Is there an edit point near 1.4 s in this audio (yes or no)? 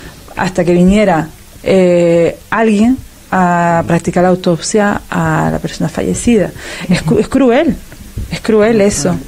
no